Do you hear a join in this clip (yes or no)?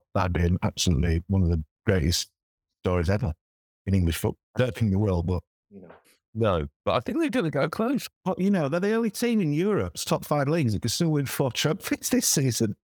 yes